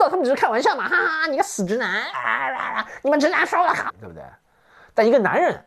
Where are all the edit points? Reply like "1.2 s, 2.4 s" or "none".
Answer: 3.9 s